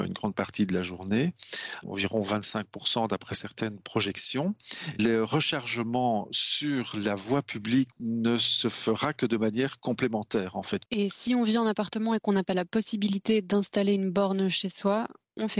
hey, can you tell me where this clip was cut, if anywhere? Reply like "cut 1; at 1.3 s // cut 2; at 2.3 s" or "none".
none